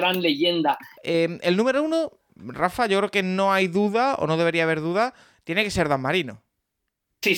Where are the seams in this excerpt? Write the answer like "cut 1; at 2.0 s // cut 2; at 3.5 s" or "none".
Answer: cut 1; at 0.9 s